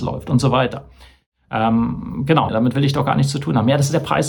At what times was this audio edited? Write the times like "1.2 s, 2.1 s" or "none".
2.5 s